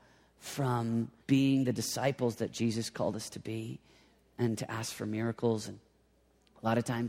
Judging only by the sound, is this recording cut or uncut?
cut